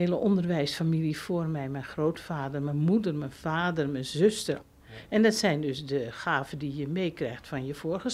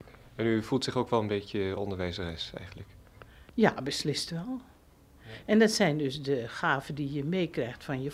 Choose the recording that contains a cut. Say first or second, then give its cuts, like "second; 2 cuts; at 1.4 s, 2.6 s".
first; 1 cut; at 4.6 s